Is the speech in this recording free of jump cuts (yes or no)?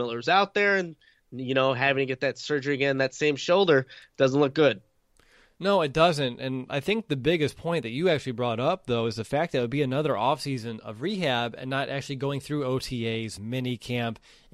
yes